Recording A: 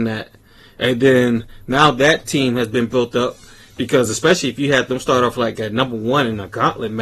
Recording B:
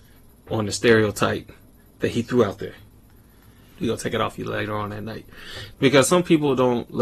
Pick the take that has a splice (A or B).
B